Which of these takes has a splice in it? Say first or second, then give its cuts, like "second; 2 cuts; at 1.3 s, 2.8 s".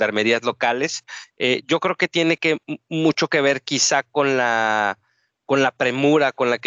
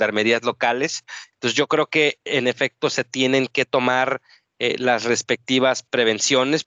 second; 1 cut; at 1.3 s